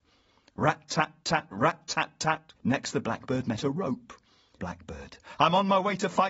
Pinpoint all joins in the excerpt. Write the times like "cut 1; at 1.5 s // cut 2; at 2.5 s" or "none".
cut 1; at 2.5 s // cut 2; at 4.6 s